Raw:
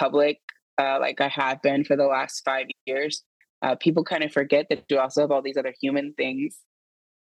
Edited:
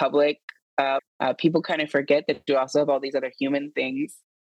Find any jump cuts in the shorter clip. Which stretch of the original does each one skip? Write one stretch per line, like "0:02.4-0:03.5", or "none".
0:01.0-0:03.4